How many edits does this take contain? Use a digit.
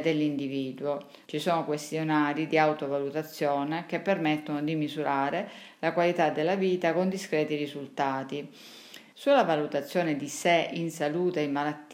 2